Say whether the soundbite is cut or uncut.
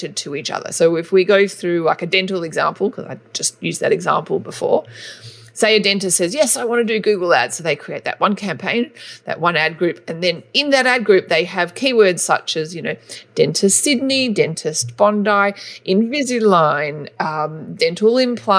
uncut